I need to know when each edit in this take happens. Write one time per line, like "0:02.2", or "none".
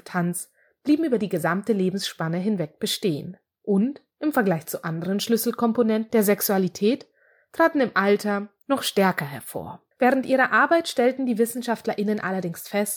0:08.6
0:09.9